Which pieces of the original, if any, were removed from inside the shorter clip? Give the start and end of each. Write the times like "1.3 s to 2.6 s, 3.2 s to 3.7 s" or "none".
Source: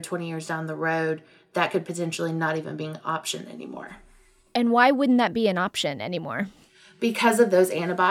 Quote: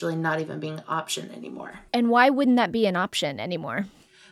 4.0 s to 4.5 s